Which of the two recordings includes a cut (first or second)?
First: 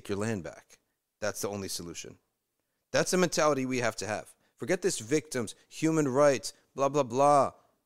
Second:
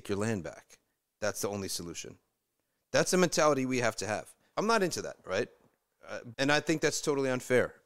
second